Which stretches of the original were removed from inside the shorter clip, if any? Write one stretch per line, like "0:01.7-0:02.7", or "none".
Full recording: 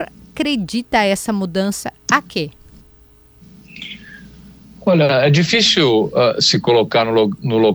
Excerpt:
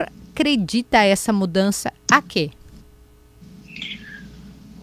none

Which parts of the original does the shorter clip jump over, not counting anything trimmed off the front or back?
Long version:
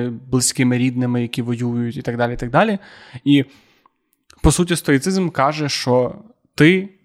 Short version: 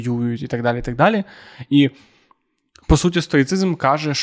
none

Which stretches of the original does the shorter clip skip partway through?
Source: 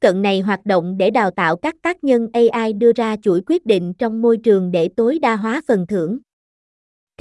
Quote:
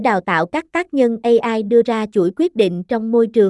none

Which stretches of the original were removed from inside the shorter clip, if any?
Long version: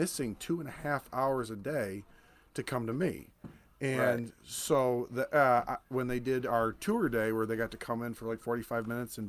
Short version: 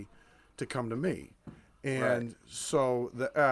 none

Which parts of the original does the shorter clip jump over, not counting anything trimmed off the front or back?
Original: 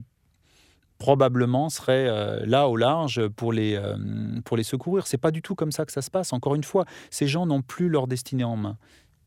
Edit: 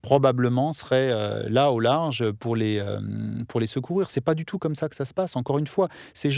none

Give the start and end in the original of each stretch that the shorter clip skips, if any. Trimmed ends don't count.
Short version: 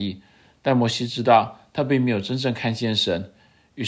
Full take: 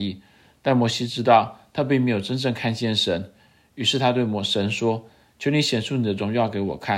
none

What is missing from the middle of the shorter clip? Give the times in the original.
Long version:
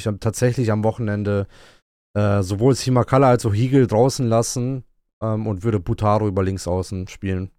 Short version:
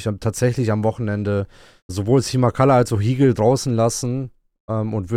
0:01.9-0:02.4

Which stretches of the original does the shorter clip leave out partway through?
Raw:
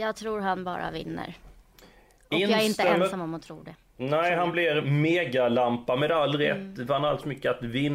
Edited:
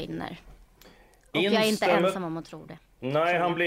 none

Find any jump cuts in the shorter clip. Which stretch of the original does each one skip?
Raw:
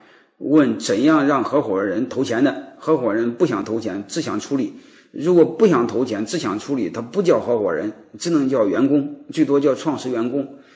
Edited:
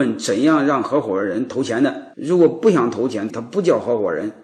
0:02.7-0:05.1
0:06.3-0:06.9

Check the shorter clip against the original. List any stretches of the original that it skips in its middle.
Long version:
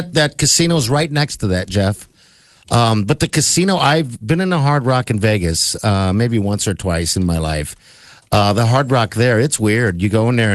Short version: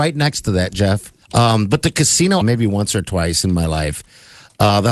0:02.2-0:02.6
0:03.8-0:06.1

